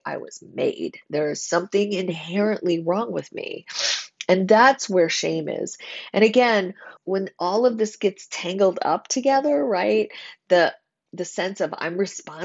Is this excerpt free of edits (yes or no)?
no